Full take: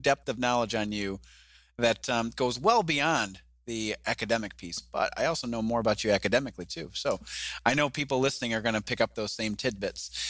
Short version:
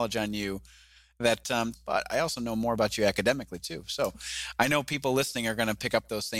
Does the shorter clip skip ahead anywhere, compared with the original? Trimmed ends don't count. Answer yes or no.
yes